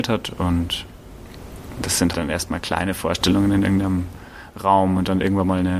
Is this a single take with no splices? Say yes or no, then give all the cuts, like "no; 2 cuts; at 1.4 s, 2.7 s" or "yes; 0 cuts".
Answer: no; 1 cut; at 2.1 s